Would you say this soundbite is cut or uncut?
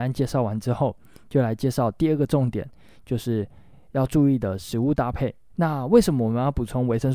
cut